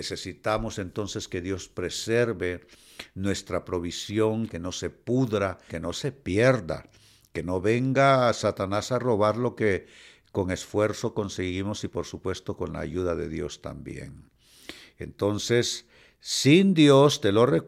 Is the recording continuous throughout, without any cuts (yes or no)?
no